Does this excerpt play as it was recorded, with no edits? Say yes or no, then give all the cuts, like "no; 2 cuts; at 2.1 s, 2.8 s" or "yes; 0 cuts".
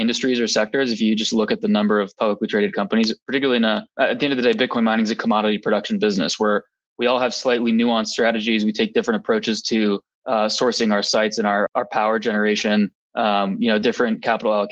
no; 2 cuts; at 3.9 s, 11.7 s